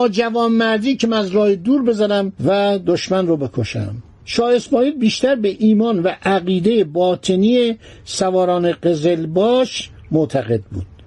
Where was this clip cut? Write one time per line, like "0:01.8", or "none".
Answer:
0:02.4